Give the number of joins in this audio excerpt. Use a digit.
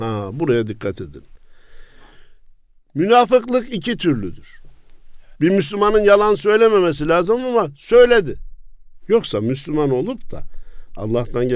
2